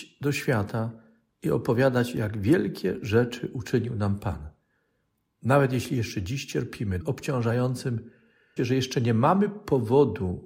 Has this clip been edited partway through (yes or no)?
yes